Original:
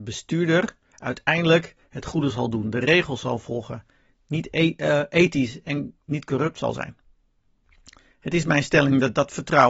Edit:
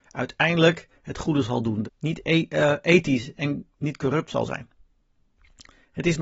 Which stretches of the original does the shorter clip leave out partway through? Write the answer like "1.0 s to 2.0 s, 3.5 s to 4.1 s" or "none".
2.7 s to 4.1 s